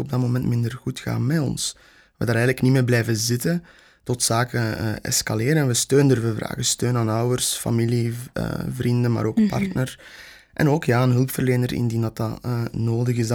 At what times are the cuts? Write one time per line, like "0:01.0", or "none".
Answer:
none